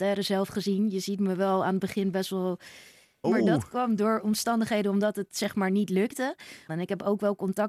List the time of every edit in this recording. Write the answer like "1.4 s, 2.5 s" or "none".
3.2 s, 6.7 s